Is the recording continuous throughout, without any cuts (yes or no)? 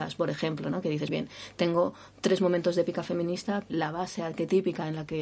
no